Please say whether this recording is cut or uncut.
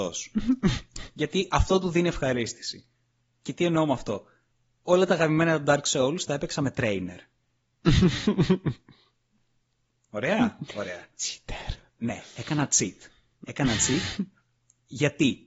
uncut